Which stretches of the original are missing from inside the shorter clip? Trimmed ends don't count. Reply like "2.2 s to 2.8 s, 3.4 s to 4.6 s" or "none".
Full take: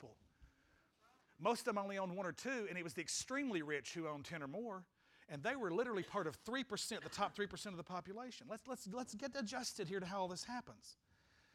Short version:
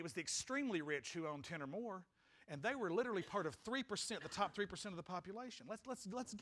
none